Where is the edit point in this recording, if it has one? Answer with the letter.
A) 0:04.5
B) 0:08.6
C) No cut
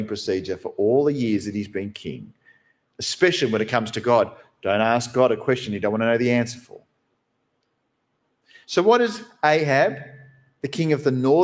C